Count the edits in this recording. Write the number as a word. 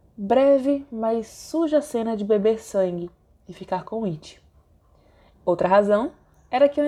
one